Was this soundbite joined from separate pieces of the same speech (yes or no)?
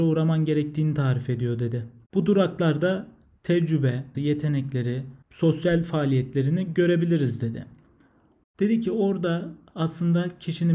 yes